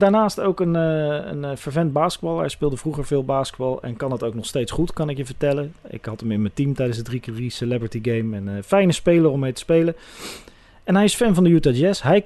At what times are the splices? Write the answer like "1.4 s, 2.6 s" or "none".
none